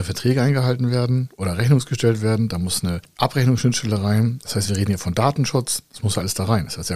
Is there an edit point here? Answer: no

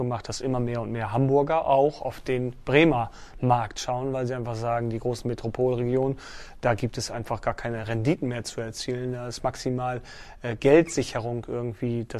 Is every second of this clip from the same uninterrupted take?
yes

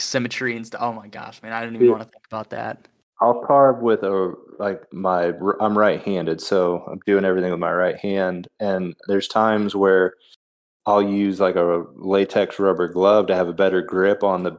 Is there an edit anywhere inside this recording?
no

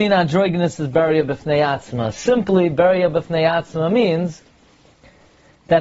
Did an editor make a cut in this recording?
no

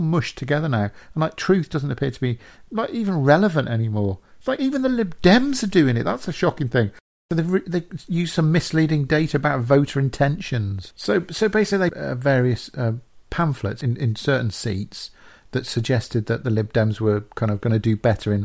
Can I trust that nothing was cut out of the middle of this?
no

